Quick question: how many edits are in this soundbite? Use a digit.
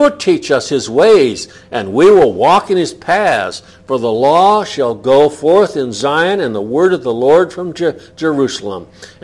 0